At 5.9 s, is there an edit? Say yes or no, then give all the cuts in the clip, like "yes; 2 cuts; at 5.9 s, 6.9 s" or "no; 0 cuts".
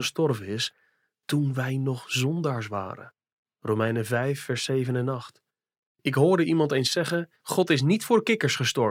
yes; 2 cuts; at 5.9 s, 7.4 s